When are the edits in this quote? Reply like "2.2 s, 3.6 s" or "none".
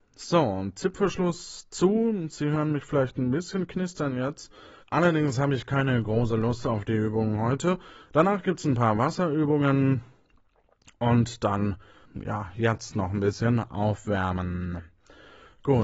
4.8 s, 8.1 s, 12.0 s